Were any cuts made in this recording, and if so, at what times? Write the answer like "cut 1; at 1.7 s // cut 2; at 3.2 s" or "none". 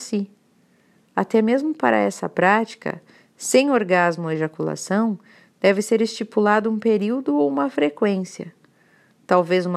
none